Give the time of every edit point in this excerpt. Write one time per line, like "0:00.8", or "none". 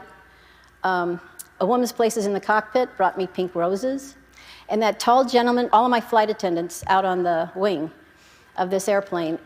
0:01.6
0:05.7